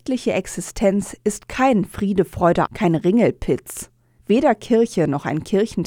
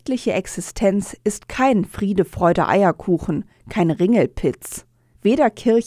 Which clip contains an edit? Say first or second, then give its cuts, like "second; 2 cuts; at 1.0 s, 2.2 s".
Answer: first; 1 cut; at 2.7 s